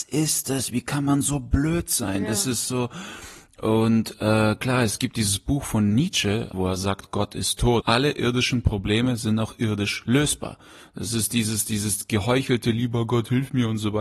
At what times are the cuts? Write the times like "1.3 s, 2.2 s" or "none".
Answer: 6.5 s, 7.8 s